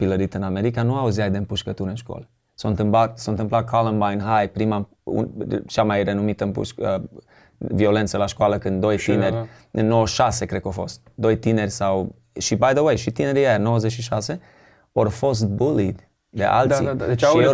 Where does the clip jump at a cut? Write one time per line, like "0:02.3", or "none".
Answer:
none